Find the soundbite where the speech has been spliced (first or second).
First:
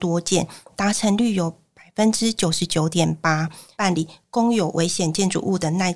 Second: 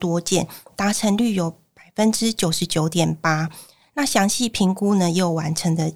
first